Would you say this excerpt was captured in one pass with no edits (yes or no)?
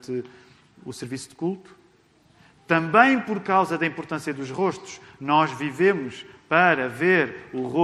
yes